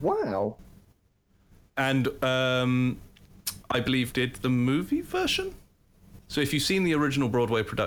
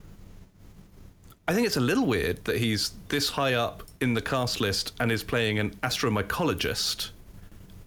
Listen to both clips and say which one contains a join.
first; 2 cuts; at 4.1 s, 6.2 s

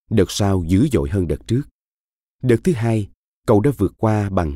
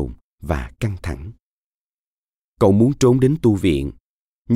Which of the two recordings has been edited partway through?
first; 1 cut; at 2.3 s

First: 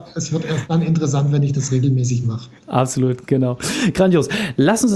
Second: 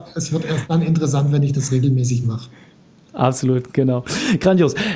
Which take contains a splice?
first; 1 cut; at 2.6 s

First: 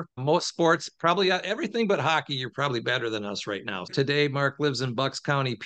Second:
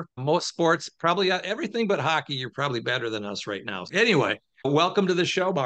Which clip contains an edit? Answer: first; 1 cut; at 3.9 s

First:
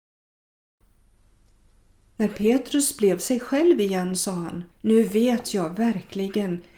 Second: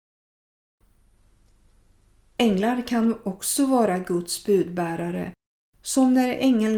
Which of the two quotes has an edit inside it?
first; 2 cuts; at 2.1 s, 4.7 s

